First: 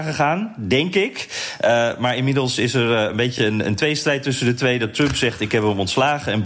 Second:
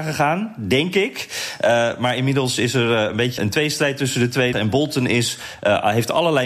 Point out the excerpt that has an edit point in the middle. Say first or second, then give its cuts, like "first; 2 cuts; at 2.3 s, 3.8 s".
second; 2 cuts; at 3.4 s, 4.5 s